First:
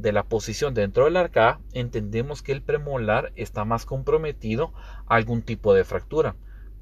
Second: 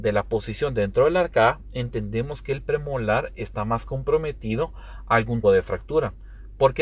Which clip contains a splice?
second; 1 cut; at 5.4 s

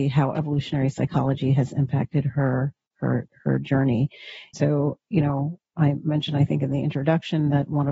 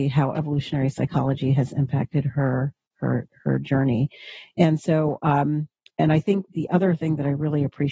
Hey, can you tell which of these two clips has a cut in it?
first; 2 cuts; at 4.5 s, 5.7 s

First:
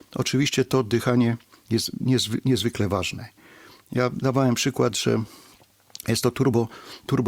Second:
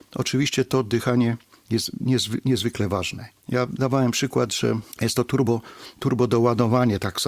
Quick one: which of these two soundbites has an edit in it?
second; 2 cuts; at 3.4 s, 4.9 s

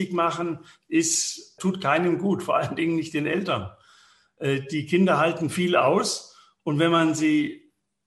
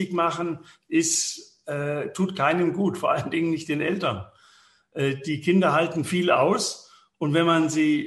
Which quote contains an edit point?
first; 1 cut; at 1.6 s

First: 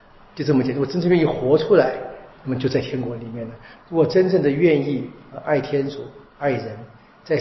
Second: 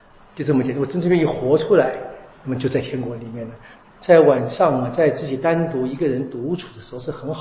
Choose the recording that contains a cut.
second; 1 cut; at 3.8 s

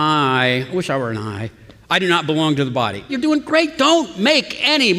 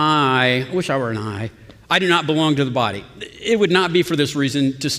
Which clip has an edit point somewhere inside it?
first; 1 cut; at 3.1 s

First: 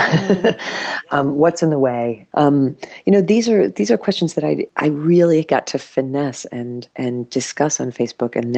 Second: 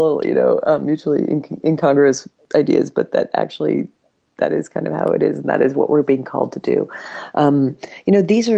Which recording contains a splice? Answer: first; 2 cuts; at 2.3 s, 6.9 s

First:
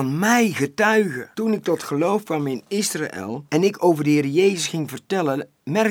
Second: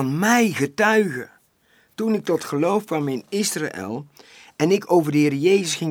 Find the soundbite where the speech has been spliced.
first; 2 cuts; at 1.3 s, 3.5 s

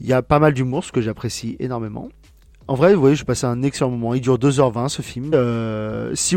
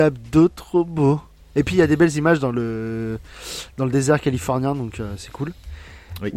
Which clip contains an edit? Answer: first; 1 cut; at 5.3 s

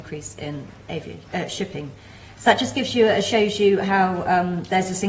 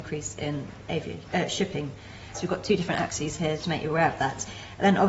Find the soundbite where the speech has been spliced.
second; 2 cuts; at 2.3 s, 3.6 s

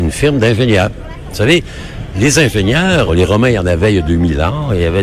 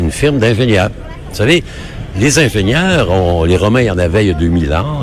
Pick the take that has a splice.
first; 1 cut; at 3.1 s

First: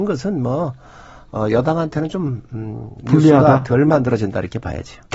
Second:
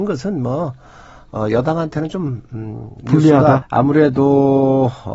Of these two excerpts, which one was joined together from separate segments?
second; 1 cut; at 3.6 s

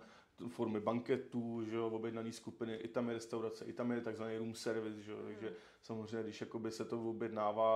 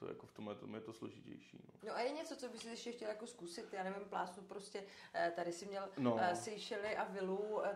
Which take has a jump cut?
second; 1 cut; at 1.8 s

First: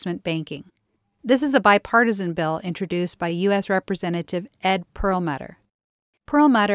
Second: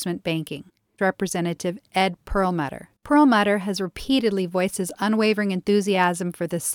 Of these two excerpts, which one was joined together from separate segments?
second; 2 cuts; at 1.0 s, 2.9 s

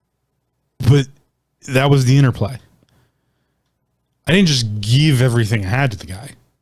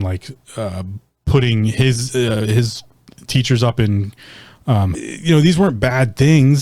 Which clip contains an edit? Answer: second; 1 cut; at 4.9 s

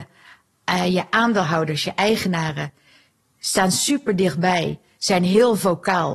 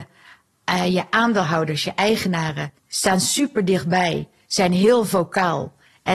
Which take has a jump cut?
second; 1 cut; at 2.8 s

